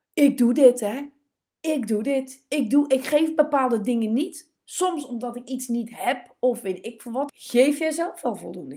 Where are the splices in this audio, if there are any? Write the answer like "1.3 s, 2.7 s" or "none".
7.3 s